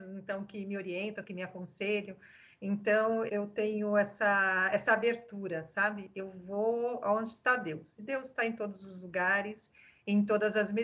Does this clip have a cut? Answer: yes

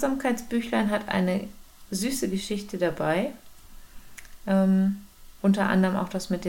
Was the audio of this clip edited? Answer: yes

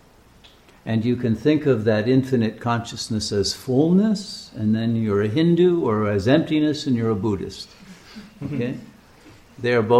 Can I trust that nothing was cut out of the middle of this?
yes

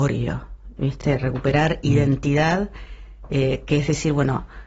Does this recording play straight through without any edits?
yes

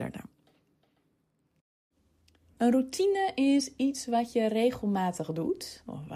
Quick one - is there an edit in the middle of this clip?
yes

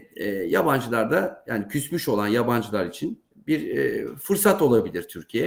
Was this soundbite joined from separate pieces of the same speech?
no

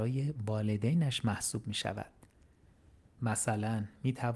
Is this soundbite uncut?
no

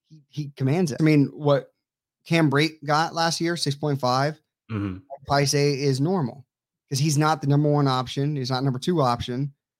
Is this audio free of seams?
no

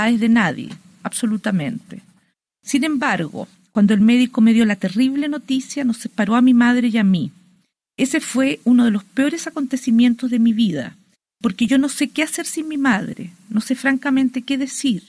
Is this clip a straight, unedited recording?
yes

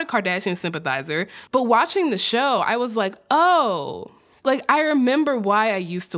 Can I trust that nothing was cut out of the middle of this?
yes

